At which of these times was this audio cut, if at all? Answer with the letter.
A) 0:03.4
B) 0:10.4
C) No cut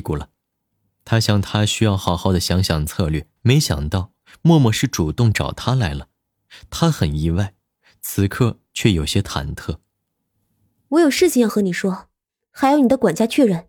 A